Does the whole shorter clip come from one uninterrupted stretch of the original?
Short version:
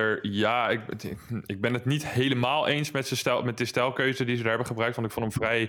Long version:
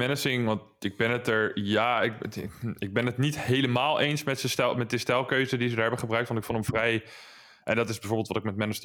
yes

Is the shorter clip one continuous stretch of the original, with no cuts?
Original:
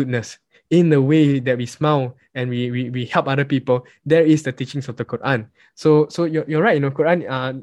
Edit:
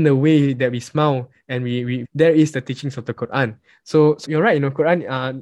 no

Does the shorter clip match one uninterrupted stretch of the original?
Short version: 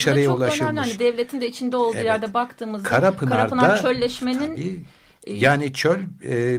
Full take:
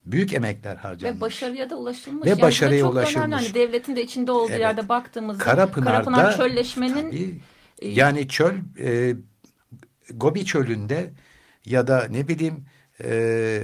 yes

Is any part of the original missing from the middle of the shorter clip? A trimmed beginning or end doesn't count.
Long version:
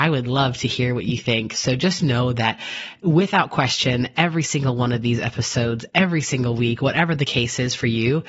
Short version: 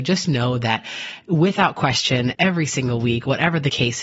yes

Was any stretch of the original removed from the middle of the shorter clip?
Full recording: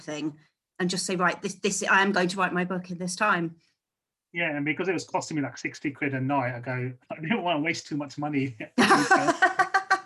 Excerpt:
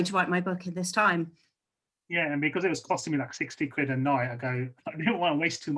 no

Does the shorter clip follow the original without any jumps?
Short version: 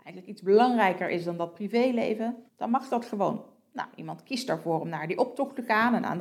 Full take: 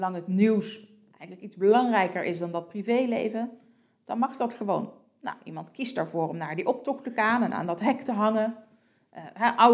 no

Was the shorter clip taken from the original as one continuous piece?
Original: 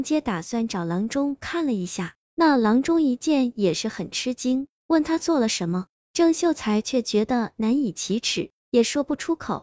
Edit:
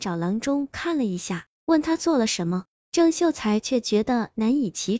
no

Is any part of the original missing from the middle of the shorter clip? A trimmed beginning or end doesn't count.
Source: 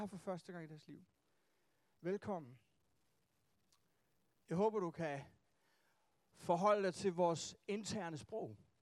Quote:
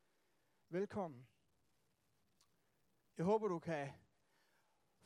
no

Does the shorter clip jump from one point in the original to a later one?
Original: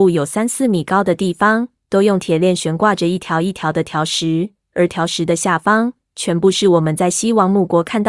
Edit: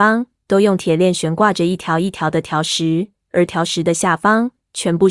no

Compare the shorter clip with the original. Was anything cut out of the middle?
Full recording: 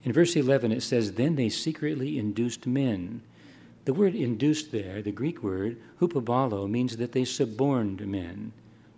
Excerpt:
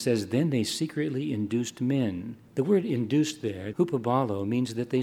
yes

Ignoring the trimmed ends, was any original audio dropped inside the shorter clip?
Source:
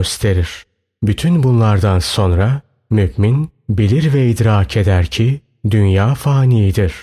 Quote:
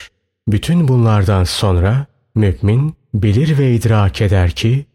no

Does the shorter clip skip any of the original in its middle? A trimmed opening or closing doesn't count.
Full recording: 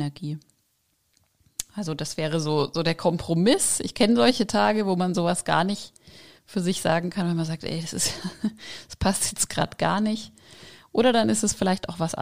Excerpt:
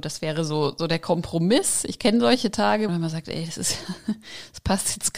yes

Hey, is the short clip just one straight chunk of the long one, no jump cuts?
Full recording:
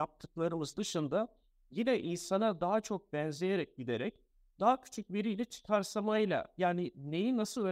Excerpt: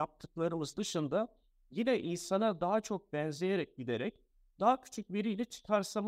yes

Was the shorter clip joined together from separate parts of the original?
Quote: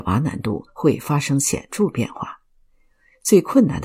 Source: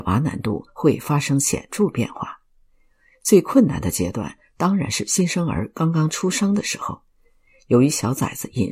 no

